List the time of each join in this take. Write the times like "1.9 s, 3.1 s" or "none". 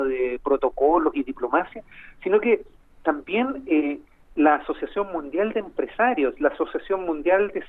none